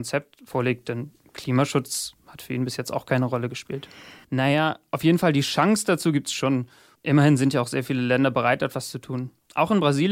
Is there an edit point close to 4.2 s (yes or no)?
yes